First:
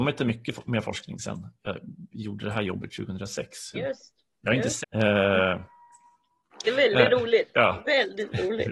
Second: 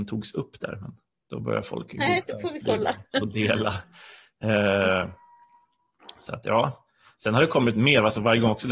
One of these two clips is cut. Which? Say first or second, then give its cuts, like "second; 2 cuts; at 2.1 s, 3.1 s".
first; 3 cuts; at 3.7 s, 4.8 s, 6.6 s